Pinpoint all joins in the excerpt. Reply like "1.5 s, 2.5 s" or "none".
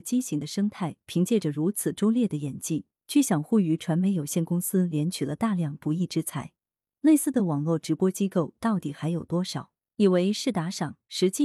none